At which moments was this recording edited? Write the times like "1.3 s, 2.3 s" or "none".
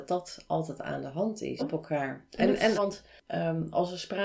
1.6 s, 2.7 s